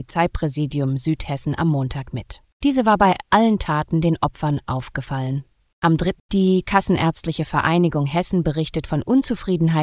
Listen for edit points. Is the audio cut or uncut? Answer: cut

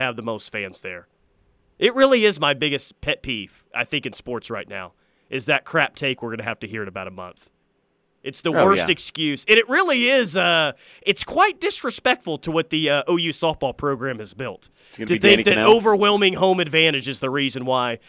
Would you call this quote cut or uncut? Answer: uncut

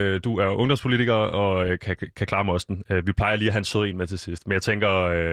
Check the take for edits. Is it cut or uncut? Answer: uncut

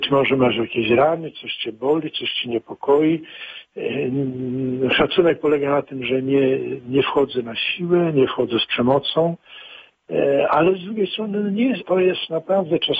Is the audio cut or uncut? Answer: cut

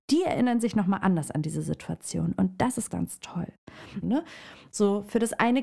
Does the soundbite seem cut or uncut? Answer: cut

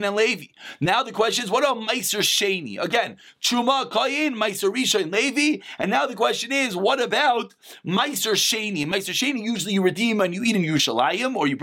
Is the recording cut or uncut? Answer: uncut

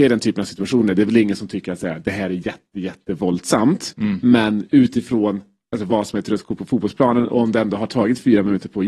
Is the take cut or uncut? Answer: uncut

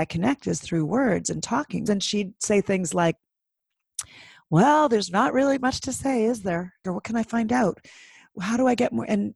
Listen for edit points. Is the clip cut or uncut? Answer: cut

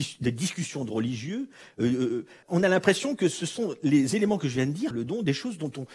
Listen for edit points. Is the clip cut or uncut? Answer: cut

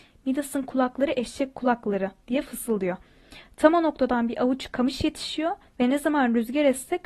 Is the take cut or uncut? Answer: uncut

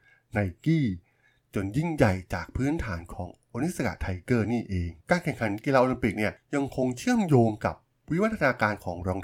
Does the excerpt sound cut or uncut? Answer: cut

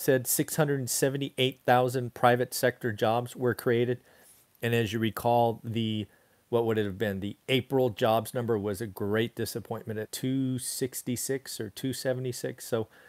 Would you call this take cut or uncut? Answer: cut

